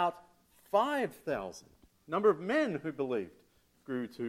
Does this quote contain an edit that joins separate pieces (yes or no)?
no